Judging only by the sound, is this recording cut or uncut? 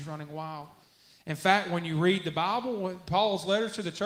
uncut